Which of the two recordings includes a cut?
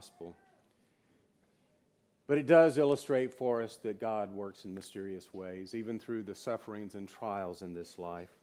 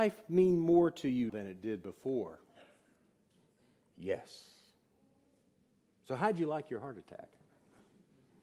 second; 2 cuts; at 1.3 s, 3.9 s

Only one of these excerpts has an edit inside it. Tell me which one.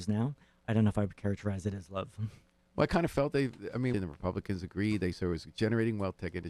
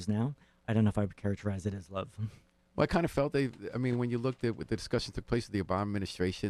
first; 1 cut; at 3.9 s

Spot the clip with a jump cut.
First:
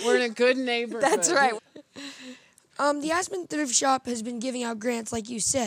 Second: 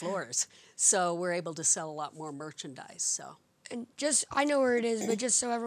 first; 1 cut; at 1.6 s

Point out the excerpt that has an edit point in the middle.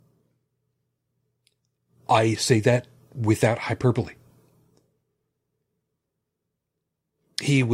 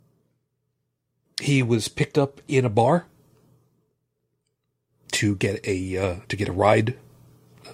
second; 2 cuts; at 1.2 s, 6.2 s

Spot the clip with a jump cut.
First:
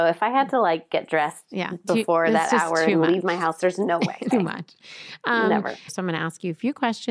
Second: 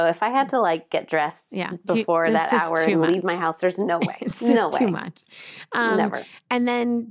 first; 2 cuts; at 4.3 s, 5.9 s

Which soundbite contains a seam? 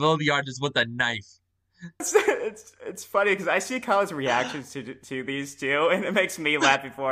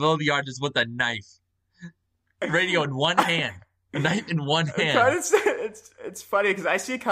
first; 1 cut; at 2.0 s

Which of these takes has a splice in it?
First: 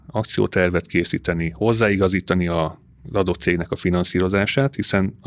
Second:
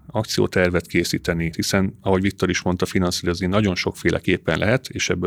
second; 1 cut; at 1.5 s

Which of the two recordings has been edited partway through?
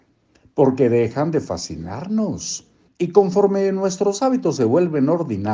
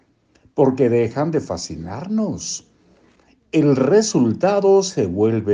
first; 1 cut; at 2.9 s

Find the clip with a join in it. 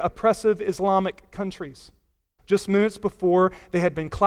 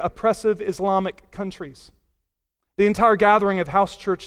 first; 1 cut; at 2.4 s

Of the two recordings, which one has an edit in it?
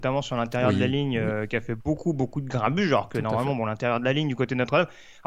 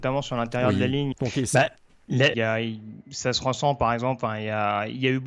second; 2 cuts; at 1.1 s, 2.3 s

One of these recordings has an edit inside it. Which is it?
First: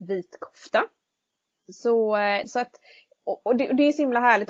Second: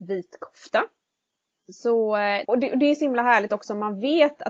second; 1 cut; at 2.4 s

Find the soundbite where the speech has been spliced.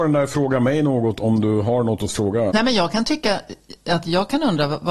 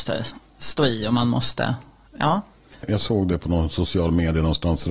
first; 1 cut; at 2.5 s

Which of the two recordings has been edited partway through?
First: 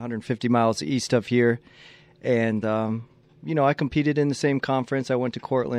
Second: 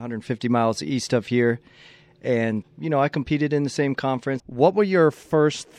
second; 2 cuts; at 2.6 s, 4.4 s

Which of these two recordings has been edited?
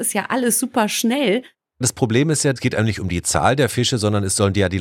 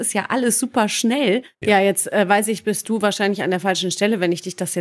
second; 1 cut; at 1.6 s

